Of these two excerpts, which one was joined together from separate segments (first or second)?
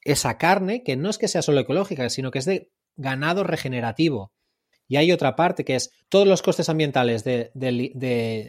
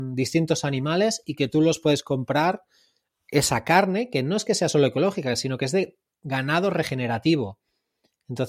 first